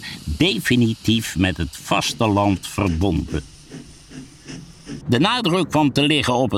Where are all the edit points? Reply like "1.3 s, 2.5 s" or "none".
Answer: 5.0 s